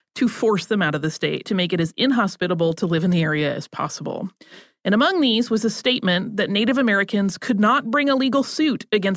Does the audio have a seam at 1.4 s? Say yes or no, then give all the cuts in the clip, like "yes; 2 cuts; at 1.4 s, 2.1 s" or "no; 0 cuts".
yes; 1 cut; at 1.4 s